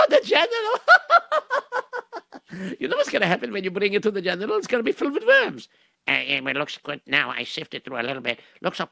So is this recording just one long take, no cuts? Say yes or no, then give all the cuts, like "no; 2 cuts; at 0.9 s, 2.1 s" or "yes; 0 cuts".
yes; 0 cuts